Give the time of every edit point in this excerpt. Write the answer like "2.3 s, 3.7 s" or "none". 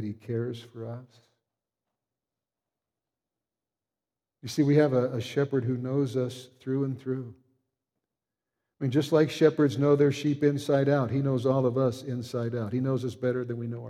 none